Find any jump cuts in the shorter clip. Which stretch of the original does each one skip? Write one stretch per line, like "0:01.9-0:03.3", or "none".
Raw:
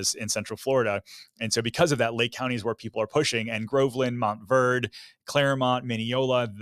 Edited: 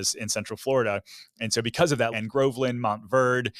0:02.1-0:03.5